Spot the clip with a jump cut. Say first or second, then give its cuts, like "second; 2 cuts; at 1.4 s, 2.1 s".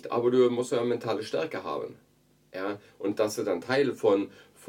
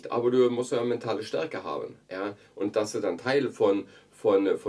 second; 1 cut; at 2.0 s